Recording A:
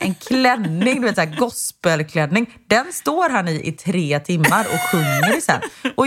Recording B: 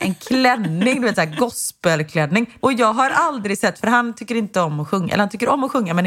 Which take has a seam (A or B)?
B